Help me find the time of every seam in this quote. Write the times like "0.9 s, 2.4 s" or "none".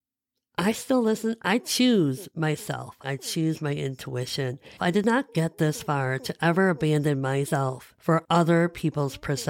3.0 s, 4.8 s